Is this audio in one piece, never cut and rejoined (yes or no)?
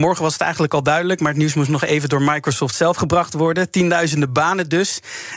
yes